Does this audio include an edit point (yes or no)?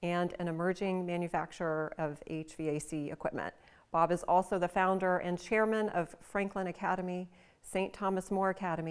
no